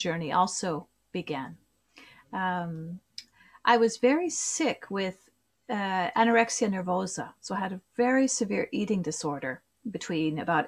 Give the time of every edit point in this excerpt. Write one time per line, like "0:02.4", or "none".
none